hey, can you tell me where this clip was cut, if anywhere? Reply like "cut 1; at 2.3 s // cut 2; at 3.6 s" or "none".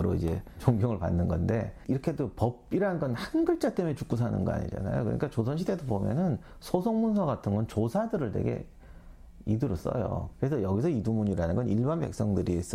cut 1; at 10.3 s

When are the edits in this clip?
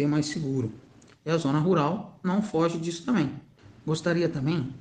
cut 1; at 1.1 s

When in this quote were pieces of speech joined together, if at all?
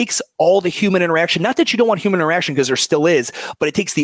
none

